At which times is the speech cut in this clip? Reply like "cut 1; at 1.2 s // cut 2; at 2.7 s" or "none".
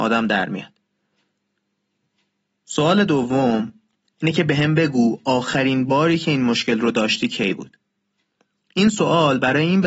none